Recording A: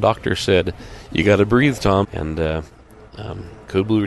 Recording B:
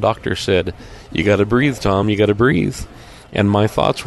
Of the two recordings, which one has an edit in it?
A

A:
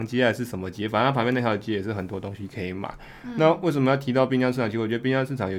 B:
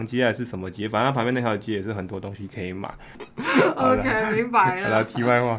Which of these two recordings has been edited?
B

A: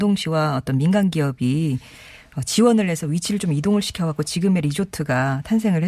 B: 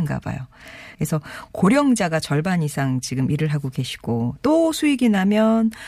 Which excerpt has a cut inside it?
B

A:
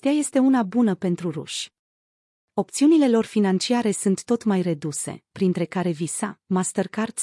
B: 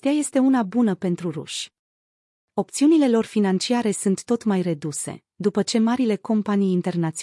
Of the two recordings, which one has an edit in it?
A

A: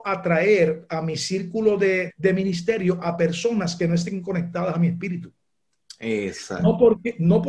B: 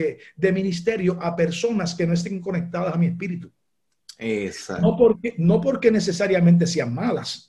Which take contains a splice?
A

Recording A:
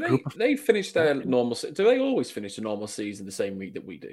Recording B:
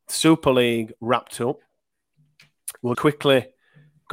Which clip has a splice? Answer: B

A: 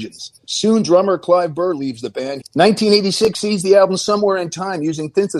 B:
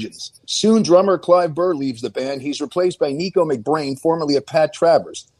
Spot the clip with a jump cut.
A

